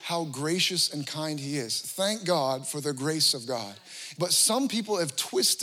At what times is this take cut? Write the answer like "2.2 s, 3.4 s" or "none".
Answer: 4.1 s